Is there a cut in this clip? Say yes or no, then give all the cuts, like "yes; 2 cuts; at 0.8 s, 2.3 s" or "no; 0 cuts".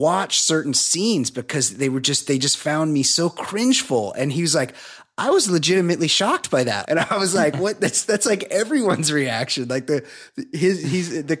yes; 1 cut; at 6.8 s